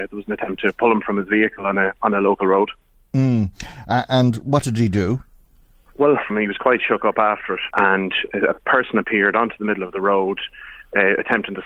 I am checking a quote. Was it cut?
yes; 2 cuts; at 6.3 s, 7.7 s

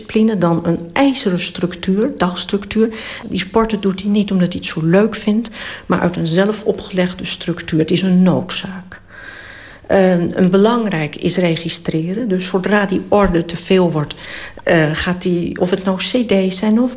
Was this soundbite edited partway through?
yes; 1 cut; at 3.2 s

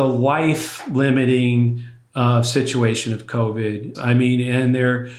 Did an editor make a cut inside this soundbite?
yes; 1 cut; at 4.0 s

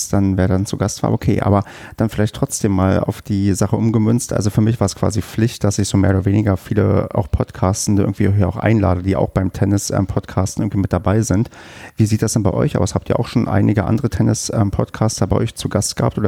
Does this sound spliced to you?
no; 0 cuts

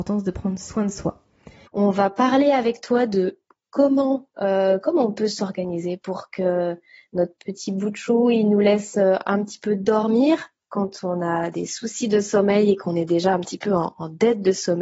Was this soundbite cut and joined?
yes; 1 cut; at 1.7 s

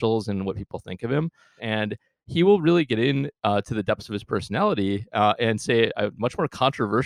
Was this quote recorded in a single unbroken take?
no; 1 cut; at 1.6 s

